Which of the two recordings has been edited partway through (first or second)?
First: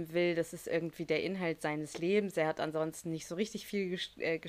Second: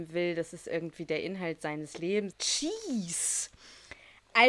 second